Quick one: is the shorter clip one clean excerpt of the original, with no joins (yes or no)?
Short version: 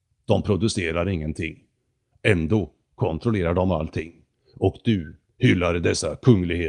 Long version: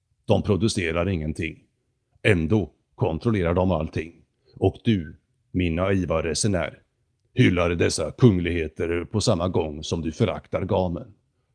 no